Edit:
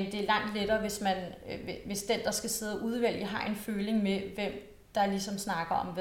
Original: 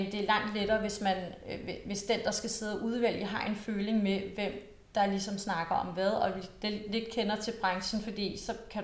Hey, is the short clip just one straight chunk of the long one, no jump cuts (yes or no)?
yes